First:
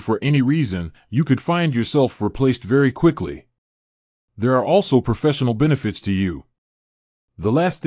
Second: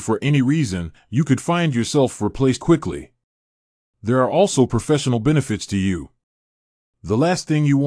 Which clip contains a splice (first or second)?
second